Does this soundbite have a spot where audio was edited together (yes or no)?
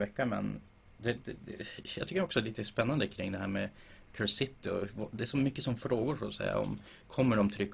no